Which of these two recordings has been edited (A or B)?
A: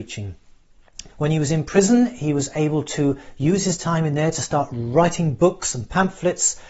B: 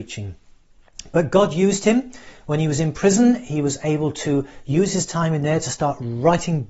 A